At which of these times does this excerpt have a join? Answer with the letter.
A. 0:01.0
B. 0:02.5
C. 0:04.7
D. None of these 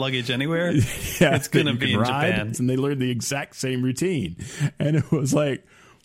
B